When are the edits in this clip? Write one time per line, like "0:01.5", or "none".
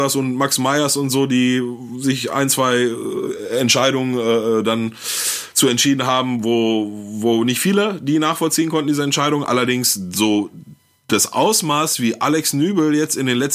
none